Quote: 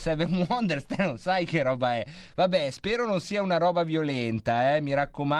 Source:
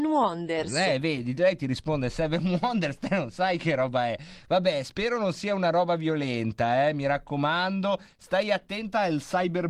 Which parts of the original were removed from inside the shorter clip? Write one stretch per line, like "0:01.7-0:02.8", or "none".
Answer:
none